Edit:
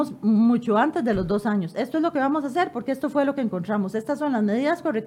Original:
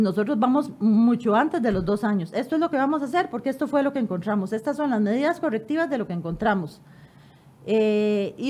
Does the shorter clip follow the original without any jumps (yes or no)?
yes